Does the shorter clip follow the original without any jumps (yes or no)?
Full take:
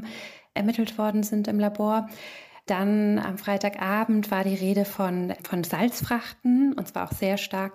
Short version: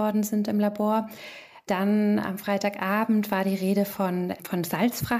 yes